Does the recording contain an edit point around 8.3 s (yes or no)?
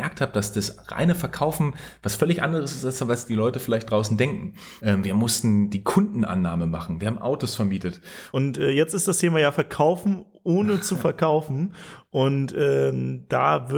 yes